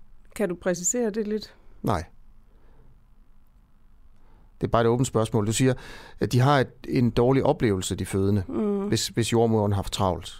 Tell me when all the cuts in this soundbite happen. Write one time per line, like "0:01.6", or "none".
none

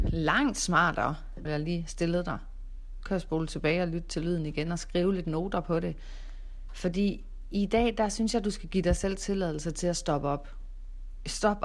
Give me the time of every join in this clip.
0:01.5

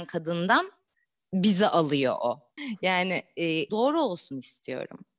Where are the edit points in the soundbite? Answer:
0:02.6
0:03.7

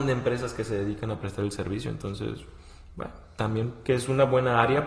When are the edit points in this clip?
none

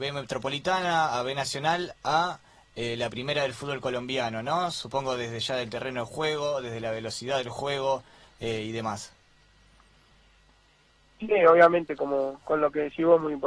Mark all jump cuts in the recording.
none

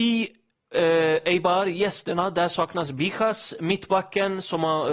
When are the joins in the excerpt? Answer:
none

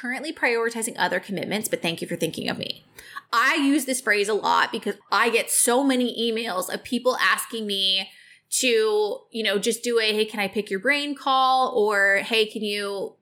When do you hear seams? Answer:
0:05.0

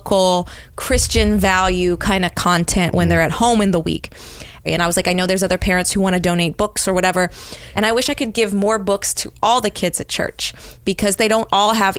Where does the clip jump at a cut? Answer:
0:04.7
0:07.7

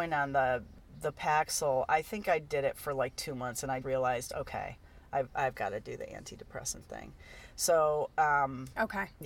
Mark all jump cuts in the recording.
0:03.8

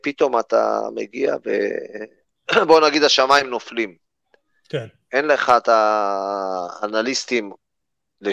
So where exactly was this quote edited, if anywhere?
none

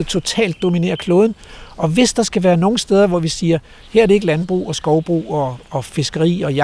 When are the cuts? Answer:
none

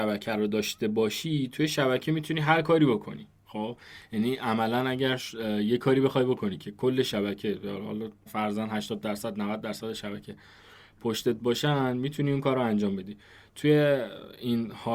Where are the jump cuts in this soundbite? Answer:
0:08.3

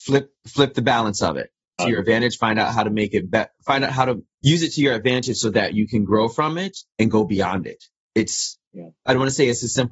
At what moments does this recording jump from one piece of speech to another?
0:01.8

